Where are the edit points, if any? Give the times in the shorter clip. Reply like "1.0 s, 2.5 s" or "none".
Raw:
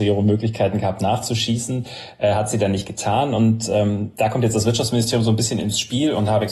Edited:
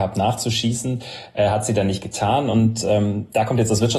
none